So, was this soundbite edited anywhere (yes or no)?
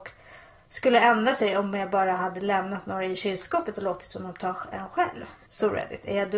no